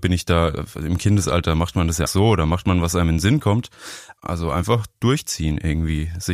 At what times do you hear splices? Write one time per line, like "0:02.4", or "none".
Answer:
0:02.1
0:04.2